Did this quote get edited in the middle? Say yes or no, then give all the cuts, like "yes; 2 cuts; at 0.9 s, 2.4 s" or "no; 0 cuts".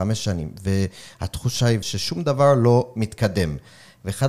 yes; 1 cut; at 1.8 s